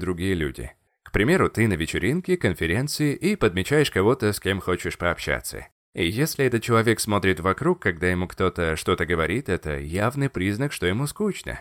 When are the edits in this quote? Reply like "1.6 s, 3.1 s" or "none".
none